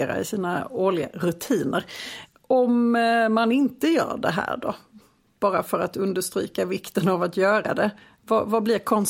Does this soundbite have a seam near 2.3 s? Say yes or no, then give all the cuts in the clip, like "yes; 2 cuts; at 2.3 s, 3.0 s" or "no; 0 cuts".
no; 0 cuts